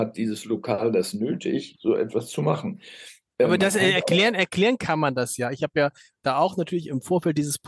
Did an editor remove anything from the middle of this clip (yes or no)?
no